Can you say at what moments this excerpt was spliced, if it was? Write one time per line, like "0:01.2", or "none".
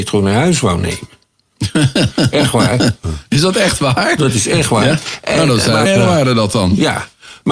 0:05.8